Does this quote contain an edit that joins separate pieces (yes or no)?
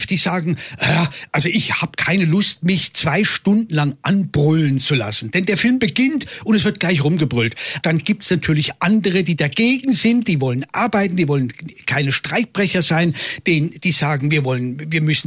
yes